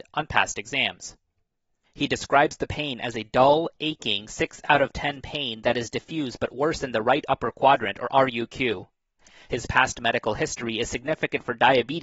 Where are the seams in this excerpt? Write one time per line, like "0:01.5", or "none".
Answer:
0:01.8